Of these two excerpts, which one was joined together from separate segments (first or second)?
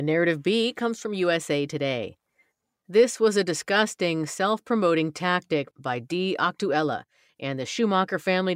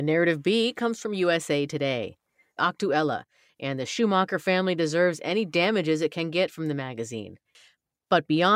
second